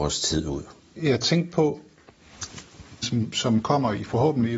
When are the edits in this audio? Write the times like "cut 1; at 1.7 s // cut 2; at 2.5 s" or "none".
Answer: cut 1; at 1.0 s // cut 2; at 3.0 s

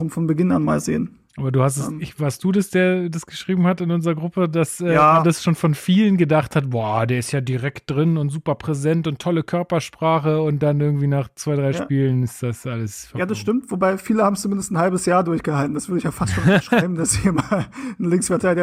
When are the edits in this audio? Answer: none

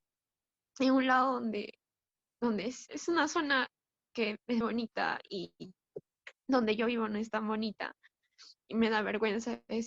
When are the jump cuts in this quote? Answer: cut 1; at 2.9 s // cut 2; at 4.6 s

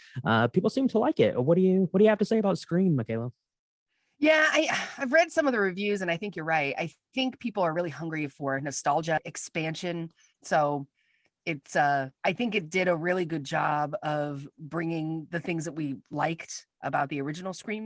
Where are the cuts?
cut 1; at 7.1 s // cut 2; at 12.2 s

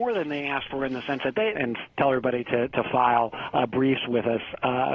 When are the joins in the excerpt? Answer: cut 1; at 1.5 s

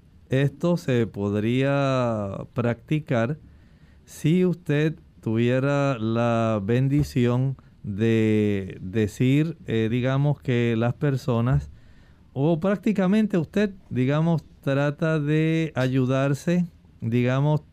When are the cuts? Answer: none

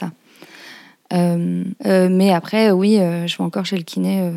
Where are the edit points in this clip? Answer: cut 1; at 1.8 s

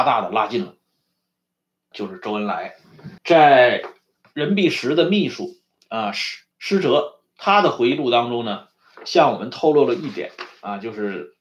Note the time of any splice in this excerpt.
cut 1; at 1.9 s // cut 2; at 3.2 s // cut 3; at 6.5 s

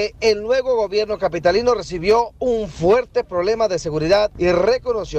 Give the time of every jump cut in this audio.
none

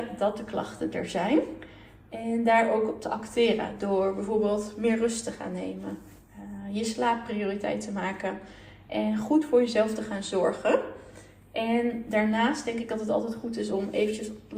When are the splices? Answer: none

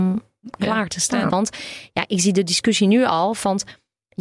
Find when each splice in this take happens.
cut 1; at 1.3 s

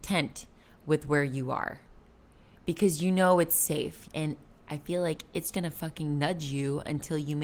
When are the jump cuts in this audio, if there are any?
cut 1; at 4.1 s // cut 2; at 5.5 s

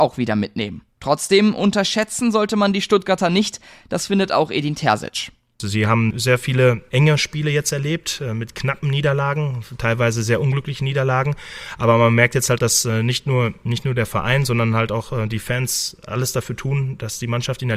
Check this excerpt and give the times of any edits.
cut 1; at 12.6 s

